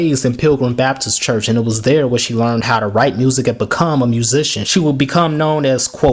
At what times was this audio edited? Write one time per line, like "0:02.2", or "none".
0:04.6

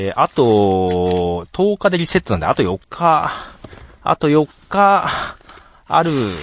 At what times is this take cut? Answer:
0:02.8

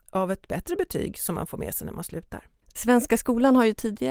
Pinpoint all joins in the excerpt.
0:02.6

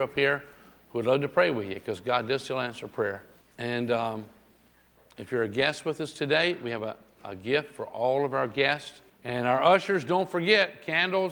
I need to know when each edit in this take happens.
0:03.4
0:09.1

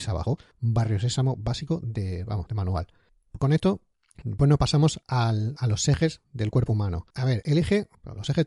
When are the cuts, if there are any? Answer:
0:07.1

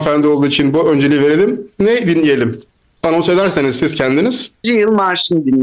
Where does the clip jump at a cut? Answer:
0:04.6

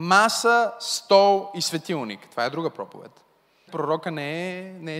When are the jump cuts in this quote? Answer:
0:03.7

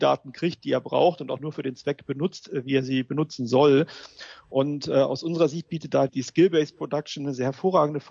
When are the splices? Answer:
0:06.1

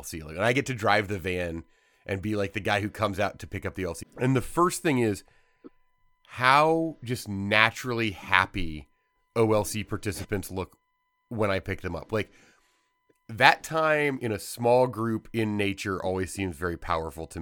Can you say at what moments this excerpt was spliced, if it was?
0:04.0

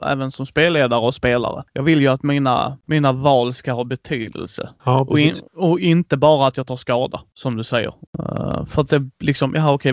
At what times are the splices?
0:08.1

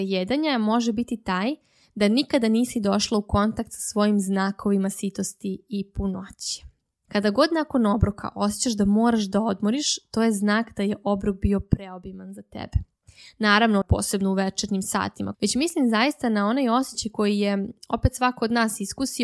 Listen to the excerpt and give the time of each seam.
0:07.1
0:13.8
0:15.3

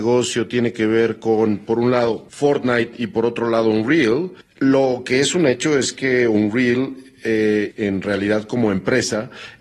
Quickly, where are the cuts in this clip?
0:07.7

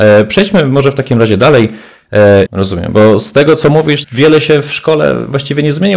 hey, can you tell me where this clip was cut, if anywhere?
0:02.5
0:04.0

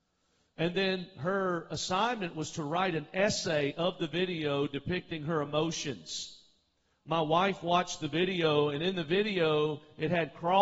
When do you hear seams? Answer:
none

